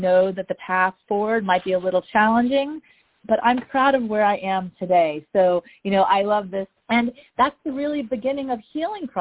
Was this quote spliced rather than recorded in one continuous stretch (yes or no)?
yes